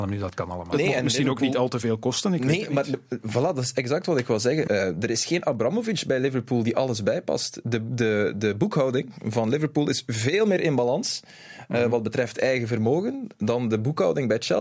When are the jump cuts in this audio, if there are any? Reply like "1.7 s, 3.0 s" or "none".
4.7 s